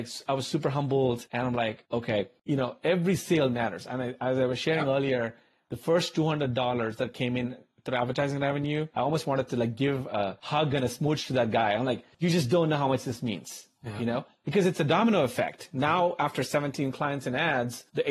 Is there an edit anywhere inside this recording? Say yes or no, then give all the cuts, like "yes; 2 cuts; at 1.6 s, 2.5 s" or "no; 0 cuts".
no; 0 cuts